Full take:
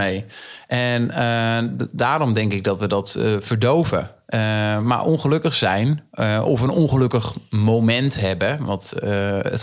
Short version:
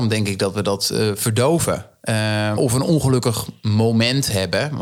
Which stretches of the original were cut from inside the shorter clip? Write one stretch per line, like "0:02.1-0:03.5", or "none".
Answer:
0:04.8-0:06.4